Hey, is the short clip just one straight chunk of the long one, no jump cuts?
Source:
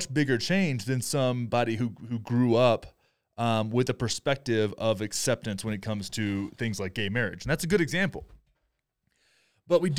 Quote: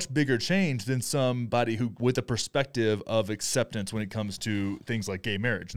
no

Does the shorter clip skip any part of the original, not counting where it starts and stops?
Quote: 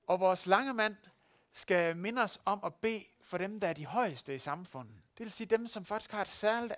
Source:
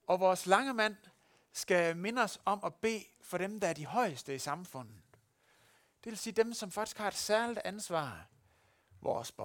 yes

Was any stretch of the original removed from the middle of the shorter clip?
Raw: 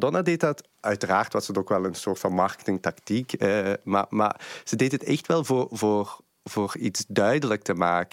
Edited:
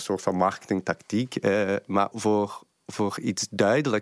yes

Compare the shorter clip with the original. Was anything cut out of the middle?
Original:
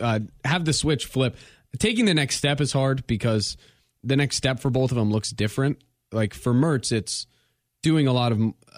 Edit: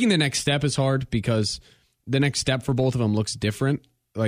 no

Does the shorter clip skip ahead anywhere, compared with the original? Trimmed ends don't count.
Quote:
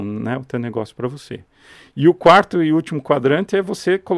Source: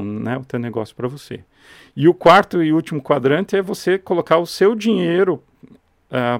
no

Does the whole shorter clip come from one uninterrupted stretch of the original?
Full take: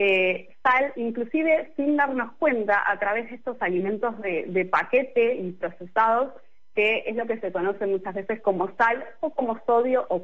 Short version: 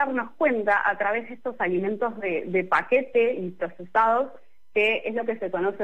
yes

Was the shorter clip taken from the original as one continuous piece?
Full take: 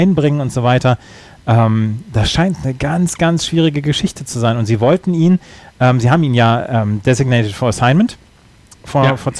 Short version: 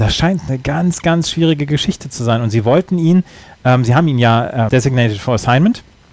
no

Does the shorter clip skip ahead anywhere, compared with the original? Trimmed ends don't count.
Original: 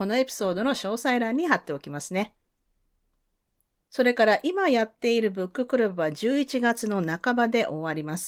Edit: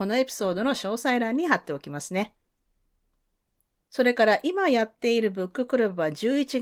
no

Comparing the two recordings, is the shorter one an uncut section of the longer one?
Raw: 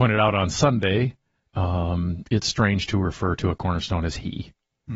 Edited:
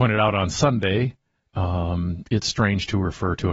yes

